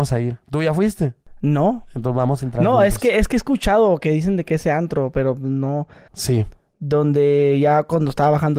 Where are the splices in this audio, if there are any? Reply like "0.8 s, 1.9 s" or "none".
6.1 s